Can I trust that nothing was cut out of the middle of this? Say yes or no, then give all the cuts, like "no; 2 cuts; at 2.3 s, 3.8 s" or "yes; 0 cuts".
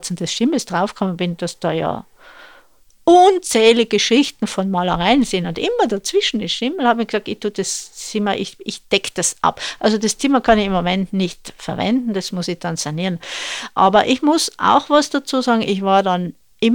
no; 1 cut; at 13.8 s